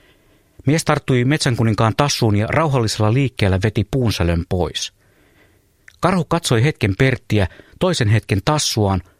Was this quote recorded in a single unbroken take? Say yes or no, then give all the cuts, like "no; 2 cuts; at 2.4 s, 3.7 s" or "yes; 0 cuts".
yes; 0 cuts